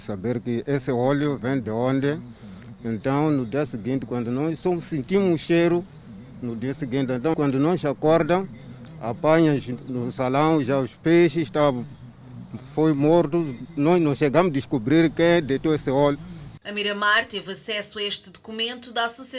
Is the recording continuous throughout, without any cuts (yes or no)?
no